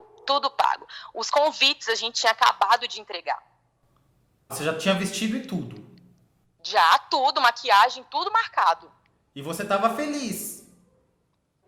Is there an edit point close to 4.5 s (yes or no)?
yes